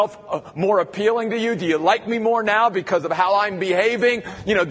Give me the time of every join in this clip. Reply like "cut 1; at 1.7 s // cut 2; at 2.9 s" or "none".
none